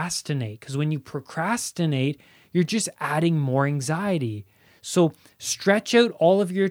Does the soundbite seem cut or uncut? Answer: uncut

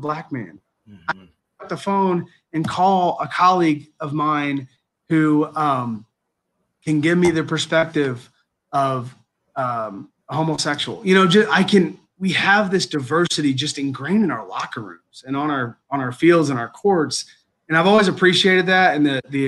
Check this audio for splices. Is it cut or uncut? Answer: uncut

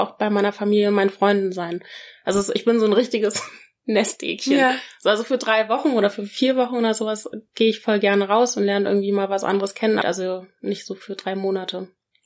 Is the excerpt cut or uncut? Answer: cut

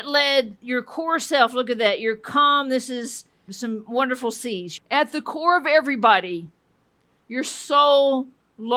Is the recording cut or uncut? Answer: cut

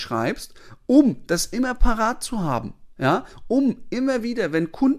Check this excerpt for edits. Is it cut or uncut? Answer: uncut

